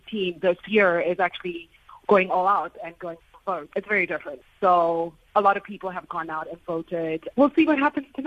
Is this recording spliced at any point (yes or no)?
yes